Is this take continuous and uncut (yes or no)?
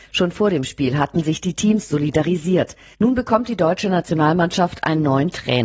no